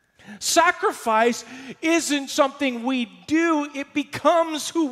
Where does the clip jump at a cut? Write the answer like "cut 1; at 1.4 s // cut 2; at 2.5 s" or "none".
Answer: cut 1; at 2.3 s